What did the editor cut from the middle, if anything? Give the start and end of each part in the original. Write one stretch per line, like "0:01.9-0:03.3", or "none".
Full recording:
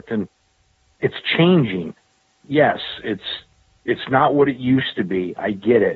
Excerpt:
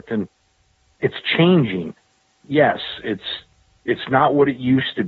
none